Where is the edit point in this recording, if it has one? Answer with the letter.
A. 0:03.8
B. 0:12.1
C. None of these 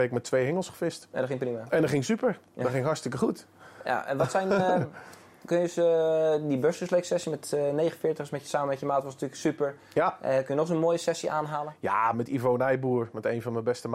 B